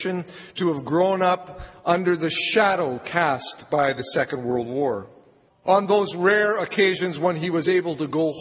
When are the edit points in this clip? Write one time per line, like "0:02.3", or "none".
0:05.5